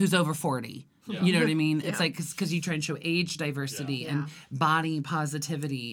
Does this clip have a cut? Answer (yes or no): no